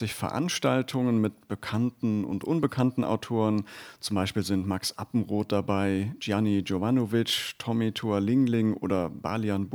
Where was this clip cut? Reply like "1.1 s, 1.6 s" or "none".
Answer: none

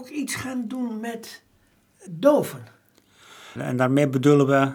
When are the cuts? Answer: 2.1 s, 3.6 s

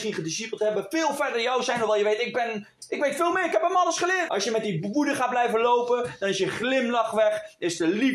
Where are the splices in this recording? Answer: 4.3 s

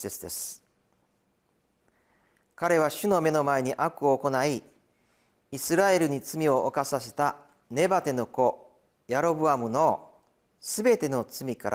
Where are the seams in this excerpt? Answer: none

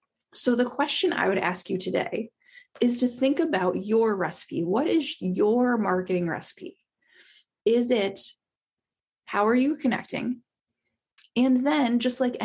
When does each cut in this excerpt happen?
11.2 s

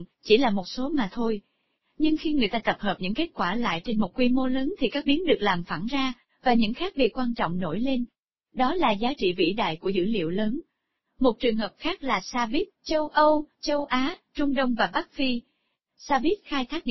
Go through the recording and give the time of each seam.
12.7 s

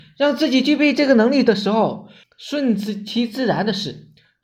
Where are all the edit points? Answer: 2.2 s

